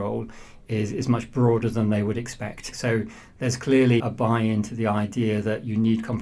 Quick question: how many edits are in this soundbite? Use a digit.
2